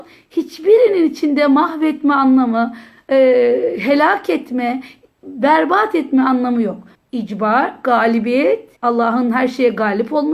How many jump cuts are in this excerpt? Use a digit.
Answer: 2